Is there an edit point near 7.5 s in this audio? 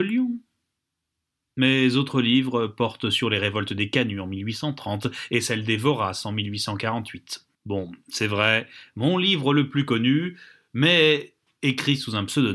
yes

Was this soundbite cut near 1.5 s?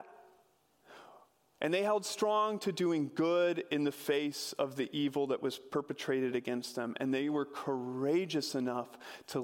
yes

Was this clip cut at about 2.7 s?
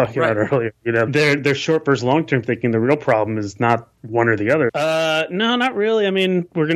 no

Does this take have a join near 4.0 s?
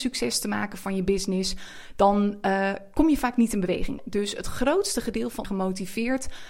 yes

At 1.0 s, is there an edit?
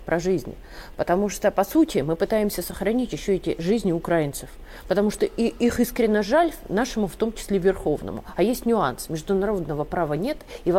no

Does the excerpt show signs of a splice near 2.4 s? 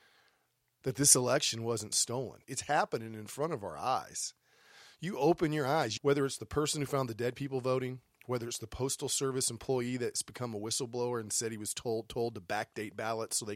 yes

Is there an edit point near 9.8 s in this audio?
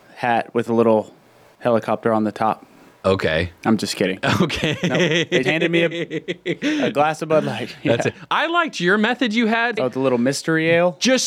yes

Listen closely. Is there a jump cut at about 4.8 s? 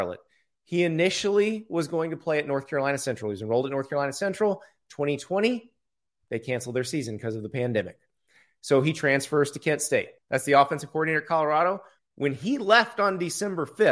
no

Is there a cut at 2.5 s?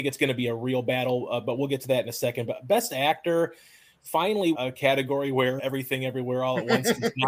no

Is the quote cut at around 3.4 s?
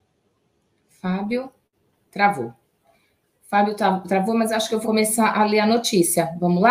no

